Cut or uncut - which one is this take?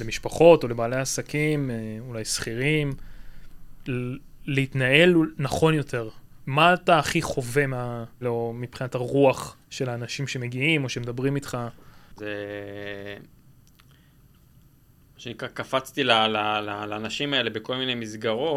cut